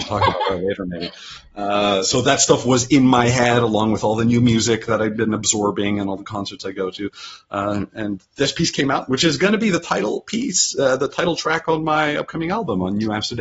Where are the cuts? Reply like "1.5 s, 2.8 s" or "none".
none